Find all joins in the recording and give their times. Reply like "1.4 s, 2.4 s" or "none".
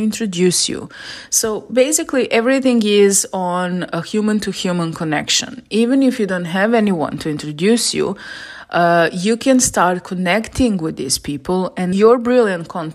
11.9 s